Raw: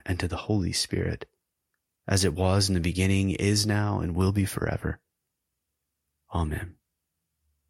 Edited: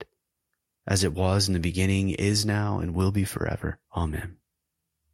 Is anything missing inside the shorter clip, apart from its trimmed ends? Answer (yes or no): yes